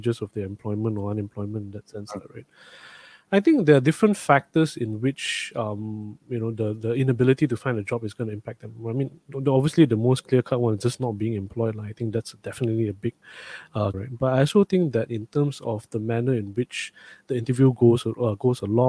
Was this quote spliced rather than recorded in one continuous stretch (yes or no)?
yes